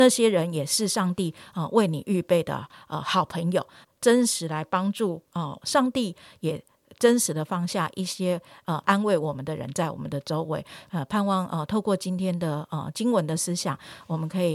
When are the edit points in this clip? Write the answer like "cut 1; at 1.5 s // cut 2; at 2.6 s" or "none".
cut 1; at 3.8 s // cut 2; at 5.6 s